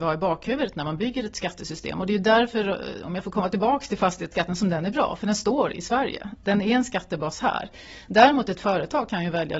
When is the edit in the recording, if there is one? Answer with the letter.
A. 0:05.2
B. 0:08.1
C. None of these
C